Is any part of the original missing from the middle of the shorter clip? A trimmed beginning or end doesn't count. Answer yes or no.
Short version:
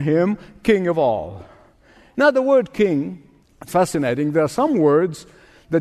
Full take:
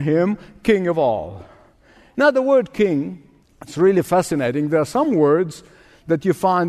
yes